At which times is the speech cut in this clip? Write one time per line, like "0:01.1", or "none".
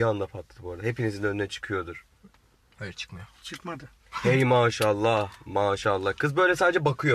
none